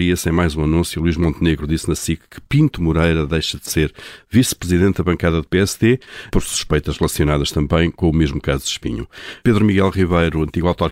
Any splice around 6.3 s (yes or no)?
yes